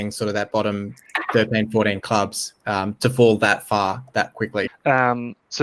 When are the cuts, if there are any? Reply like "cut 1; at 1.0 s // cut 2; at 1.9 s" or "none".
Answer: cut 1; at 4.7 s